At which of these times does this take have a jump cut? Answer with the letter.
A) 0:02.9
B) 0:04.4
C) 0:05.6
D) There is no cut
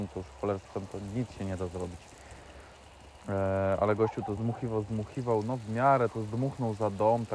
B